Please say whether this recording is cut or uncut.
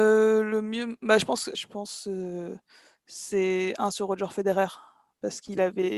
cut